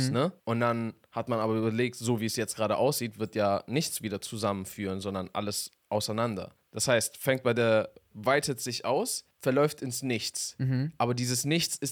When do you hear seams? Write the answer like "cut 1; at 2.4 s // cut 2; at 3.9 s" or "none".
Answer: cut 1; at 6.6 s // cut 2; at 8.1 s